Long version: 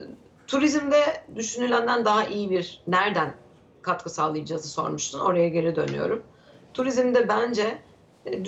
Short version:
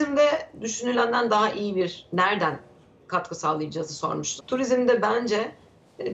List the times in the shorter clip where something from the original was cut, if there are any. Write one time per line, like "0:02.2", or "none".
0:04.4